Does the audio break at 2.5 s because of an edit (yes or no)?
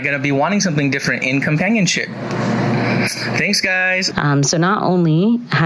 no